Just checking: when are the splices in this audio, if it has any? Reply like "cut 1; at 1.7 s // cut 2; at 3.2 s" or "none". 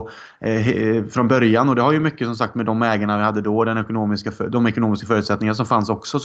none